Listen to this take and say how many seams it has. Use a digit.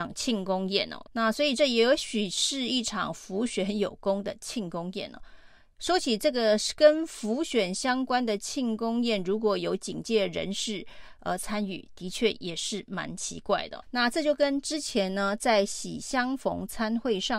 2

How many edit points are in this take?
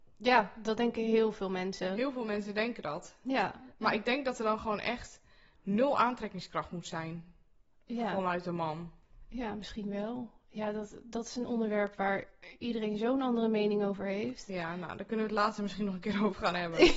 0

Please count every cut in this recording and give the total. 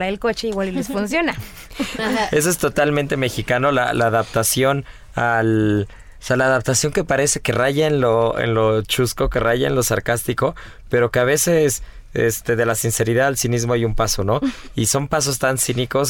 1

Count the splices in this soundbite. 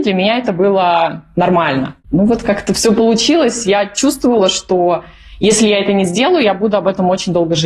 1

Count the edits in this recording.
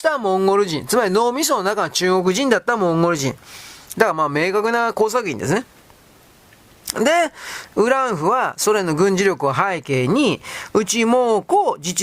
2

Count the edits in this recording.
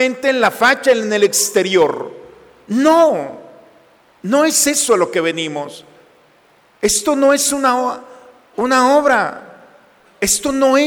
0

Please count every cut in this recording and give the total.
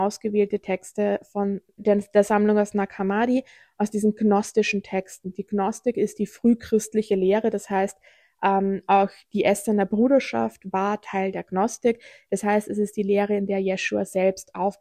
1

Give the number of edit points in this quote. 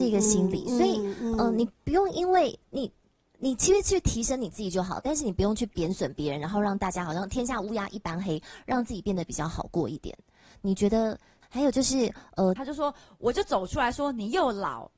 2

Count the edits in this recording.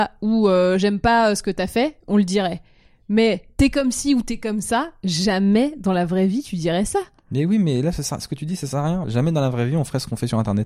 1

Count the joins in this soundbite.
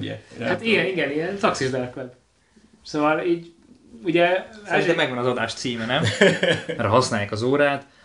1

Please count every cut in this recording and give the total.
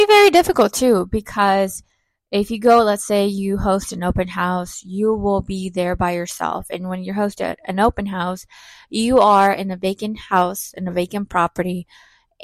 0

